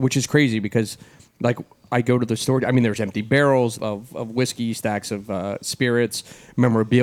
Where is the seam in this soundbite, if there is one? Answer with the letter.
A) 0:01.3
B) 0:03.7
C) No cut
B